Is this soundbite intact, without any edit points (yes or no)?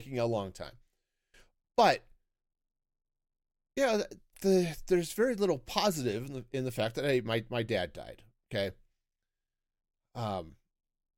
no